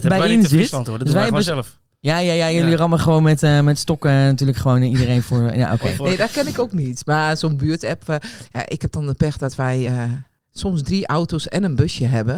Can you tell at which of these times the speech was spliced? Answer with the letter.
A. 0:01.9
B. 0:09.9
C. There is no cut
C